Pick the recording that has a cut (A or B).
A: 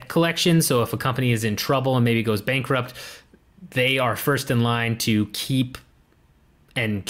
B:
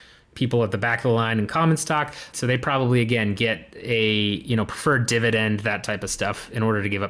B